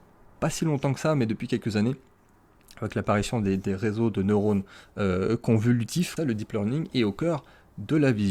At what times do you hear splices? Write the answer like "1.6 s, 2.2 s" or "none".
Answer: 6.2 s